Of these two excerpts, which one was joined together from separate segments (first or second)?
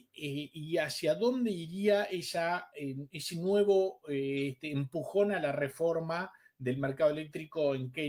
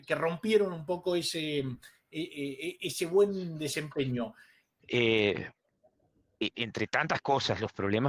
second